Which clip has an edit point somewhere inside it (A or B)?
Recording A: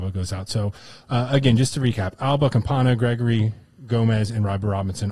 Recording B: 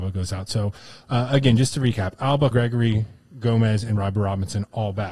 B